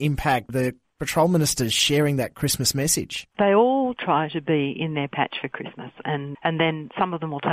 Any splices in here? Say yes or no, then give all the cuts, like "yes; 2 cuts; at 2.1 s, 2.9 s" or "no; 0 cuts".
yes; 2 cuts; at 3.3 s, 6.3 s